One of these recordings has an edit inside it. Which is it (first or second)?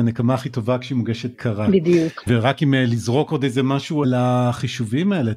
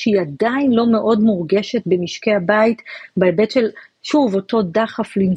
first